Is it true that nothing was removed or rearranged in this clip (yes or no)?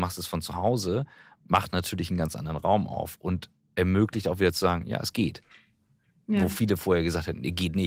yes